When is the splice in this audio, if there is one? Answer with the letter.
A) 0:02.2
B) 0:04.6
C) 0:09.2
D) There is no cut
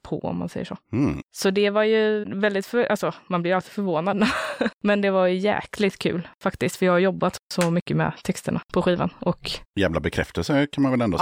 A